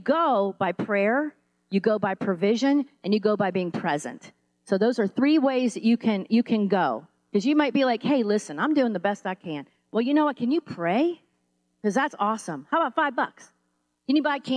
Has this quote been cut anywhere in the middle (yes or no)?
no